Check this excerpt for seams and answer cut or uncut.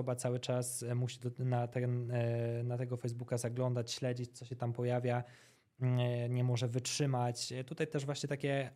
uncut